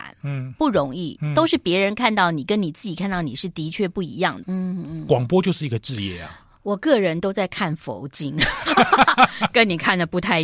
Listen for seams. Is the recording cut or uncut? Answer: cut